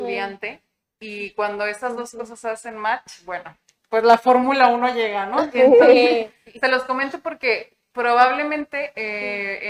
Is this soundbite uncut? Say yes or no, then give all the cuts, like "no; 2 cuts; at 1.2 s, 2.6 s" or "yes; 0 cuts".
yes; 0 cuts